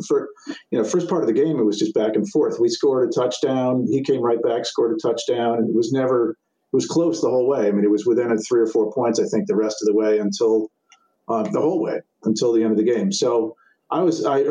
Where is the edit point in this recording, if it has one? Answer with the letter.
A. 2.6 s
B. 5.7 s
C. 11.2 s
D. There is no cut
D